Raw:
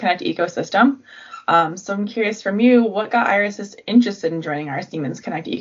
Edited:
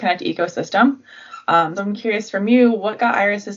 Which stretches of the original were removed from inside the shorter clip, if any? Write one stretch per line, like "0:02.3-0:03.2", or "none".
0:01.8-0:01.9